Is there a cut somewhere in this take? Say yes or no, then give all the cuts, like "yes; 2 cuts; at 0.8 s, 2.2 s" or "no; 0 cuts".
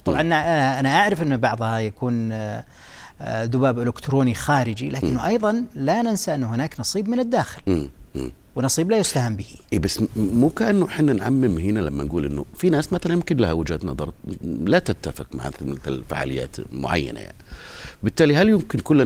no; 0 cuts